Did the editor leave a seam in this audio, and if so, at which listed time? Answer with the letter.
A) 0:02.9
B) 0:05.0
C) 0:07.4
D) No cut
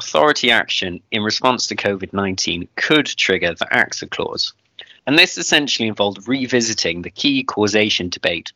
B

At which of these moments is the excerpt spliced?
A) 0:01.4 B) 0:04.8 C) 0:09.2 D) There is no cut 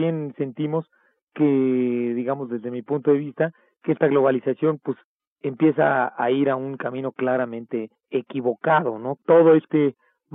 C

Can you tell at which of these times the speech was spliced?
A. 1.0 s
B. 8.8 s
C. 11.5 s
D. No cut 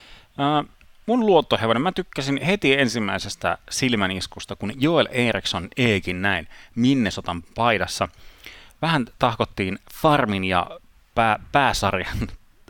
A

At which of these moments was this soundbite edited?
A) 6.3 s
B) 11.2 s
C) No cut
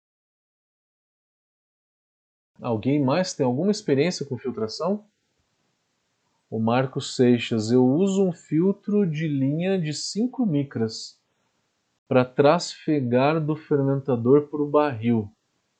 A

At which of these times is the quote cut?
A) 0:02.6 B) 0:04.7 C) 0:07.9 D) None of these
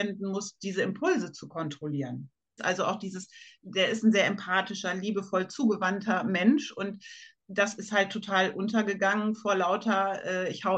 A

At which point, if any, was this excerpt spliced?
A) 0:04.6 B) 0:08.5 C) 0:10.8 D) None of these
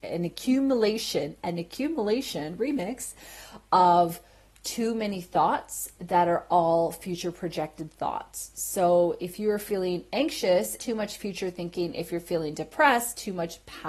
C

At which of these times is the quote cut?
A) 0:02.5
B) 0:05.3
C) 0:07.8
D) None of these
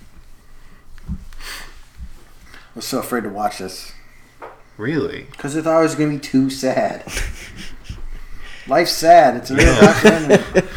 A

